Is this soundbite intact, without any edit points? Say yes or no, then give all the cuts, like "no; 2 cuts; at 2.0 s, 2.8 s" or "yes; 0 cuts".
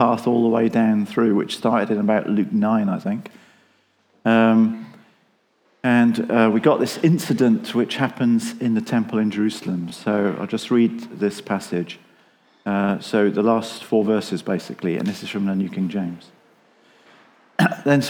yes; 0 cuts